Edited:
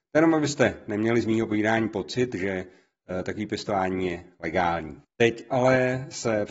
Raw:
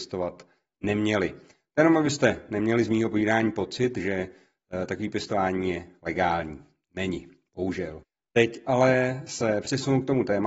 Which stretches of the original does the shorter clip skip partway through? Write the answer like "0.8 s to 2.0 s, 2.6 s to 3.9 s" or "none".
6.7 s to 8.2 s